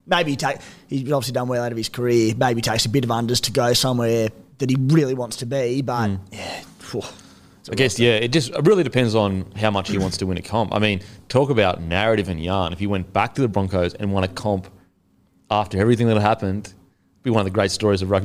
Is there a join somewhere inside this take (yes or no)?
no